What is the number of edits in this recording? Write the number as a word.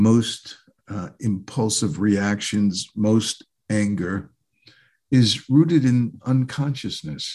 zero